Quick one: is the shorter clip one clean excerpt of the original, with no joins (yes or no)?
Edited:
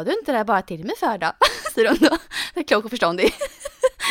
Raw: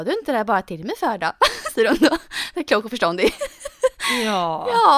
yes